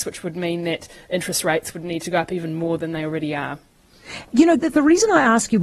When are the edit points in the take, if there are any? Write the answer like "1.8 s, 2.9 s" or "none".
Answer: 4.6 s